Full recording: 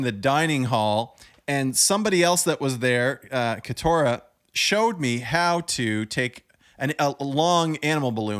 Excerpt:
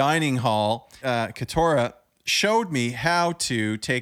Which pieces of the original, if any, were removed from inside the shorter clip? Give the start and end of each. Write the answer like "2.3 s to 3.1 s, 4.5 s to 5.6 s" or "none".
1.3 s to 3.3 s